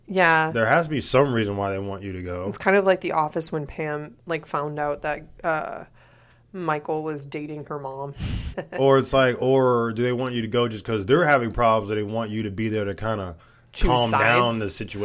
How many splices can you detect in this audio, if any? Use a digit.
1